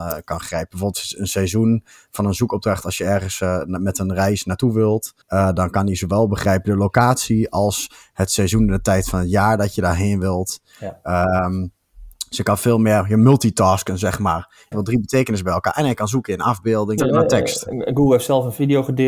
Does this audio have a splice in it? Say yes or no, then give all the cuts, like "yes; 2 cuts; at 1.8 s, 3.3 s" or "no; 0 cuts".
yes; 3 cuts; at 5.2 s, 14.7 s, 17.0 s